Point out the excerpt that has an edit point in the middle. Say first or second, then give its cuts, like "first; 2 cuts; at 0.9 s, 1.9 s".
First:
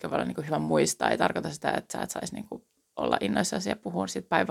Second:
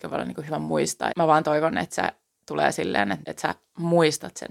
second; 2 cuts; at 1.1 s, 3.2 s